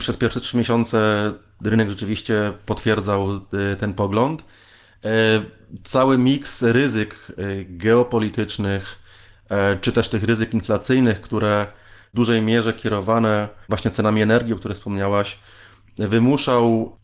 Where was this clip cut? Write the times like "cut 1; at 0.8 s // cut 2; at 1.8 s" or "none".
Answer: none